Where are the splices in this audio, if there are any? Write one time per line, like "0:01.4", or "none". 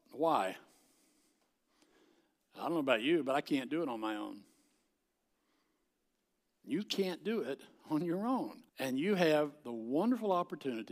0:08.7